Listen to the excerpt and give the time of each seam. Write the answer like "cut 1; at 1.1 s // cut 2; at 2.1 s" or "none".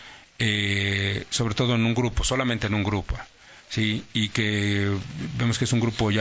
none